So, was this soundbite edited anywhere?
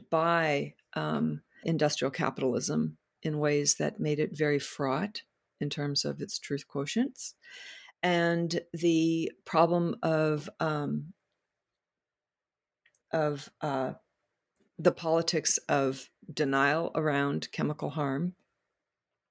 yes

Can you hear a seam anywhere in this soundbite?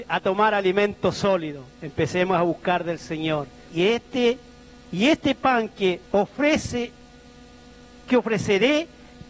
yes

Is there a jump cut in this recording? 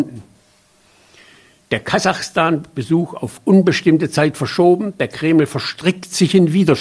no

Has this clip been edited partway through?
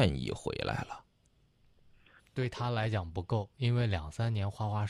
yes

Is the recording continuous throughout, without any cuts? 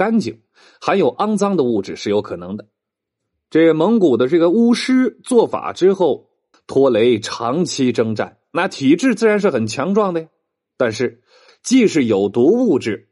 no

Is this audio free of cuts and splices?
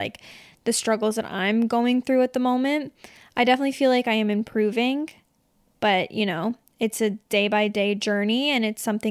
yes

